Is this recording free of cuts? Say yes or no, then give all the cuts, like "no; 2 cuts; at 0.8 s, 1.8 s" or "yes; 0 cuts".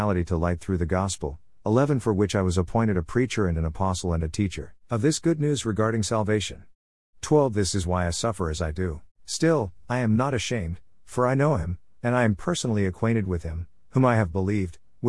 yes; 0 cuts